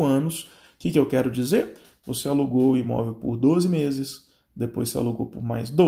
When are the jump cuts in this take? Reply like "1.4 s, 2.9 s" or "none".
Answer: none